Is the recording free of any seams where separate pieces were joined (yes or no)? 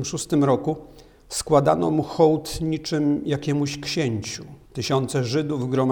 no